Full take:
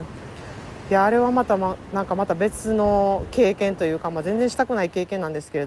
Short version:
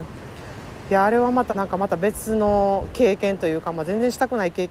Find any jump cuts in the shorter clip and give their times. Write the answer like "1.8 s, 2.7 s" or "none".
1.5 s